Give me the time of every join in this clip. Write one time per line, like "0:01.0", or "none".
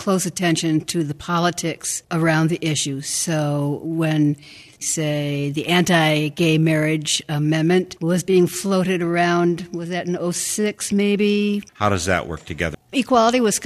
0:11.7
0:12.7